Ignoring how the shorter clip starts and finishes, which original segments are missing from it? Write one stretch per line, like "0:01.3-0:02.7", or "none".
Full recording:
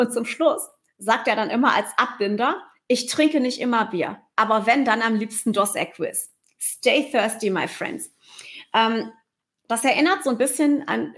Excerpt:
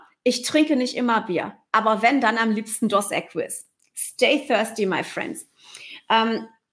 none